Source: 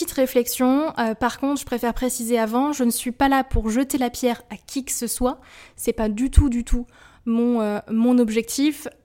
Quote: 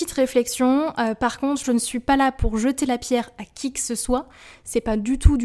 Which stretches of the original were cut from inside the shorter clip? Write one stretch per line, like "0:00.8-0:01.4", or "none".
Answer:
0:01.6-0:02.8